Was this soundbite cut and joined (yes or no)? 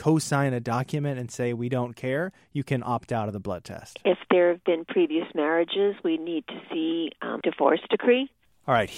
yes